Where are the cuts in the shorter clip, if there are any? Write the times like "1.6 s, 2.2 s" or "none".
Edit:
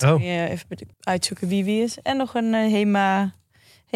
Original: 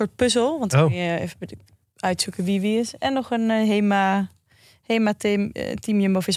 0.9 s